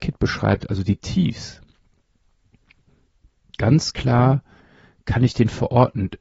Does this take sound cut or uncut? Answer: uncut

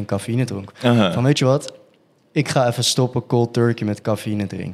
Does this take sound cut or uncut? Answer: uncut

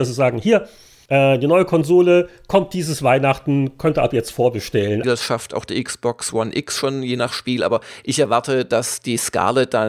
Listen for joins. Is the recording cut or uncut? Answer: cut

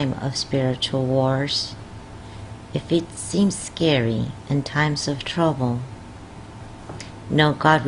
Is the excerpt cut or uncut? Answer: uncut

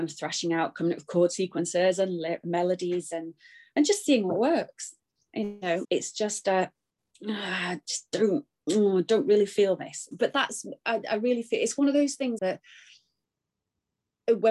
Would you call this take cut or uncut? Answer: cut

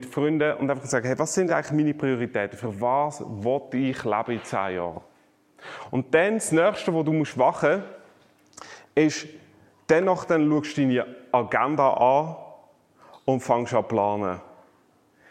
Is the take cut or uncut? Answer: uncut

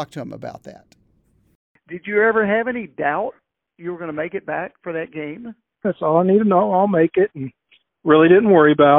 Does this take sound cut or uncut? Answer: cut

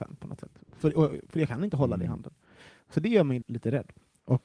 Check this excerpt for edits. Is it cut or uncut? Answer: cut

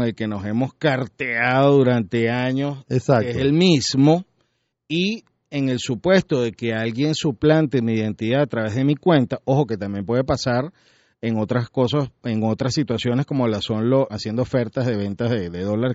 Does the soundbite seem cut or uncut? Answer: cut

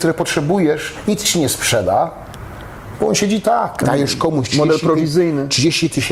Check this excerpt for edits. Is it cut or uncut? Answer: cut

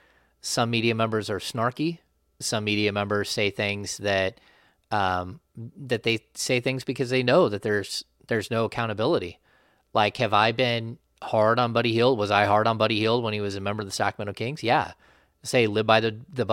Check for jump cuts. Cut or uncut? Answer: uncut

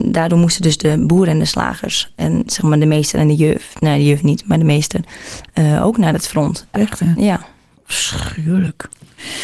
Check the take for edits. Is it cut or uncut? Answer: cut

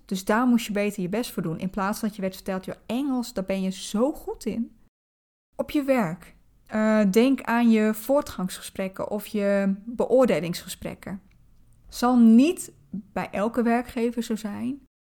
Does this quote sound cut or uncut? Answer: uncut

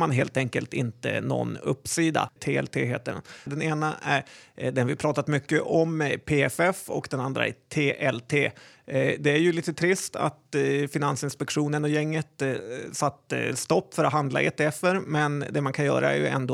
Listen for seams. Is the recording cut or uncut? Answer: cut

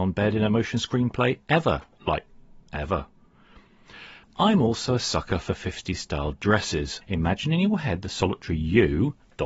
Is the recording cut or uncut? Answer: cut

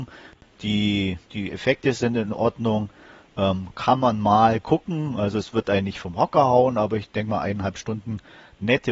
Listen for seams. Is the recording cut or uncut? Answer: uncut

